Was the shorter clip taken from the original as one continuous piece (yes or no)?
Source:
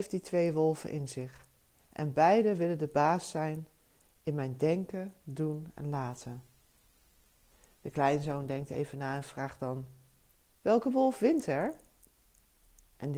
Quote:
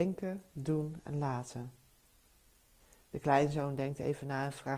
yes